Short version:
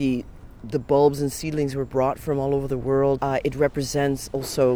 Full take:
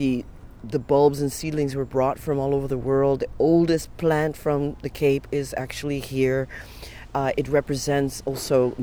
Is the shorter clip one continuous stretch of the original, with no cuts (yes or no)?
no